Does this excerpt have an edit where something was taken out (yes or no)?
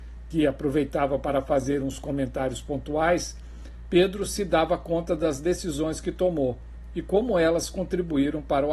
no